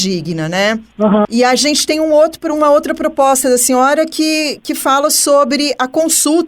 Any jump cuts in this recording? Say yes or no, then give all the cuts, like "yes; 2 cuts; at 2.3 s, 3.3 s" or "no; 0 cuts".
yes; 1 cut; at 1.2 s